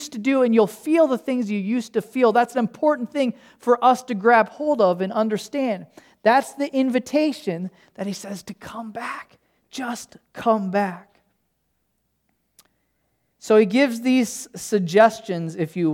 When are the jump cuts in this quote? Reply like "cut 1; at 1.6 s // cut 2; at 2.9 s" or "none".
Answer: none